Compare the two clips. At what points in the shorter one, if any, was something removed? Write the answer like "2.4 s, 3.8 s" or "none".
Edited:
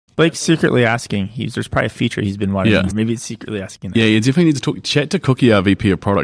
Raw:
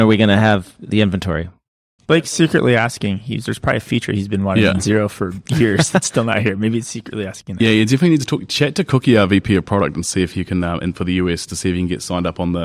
2.9 s